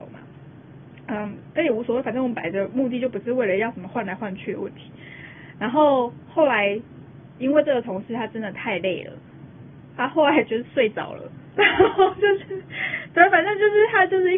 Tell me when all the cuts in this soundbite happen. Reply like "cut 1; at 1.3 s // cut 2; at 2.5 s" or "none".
none